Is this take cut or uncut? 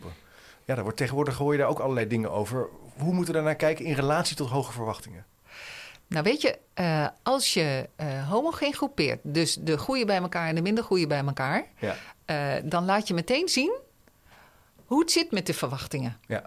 uncut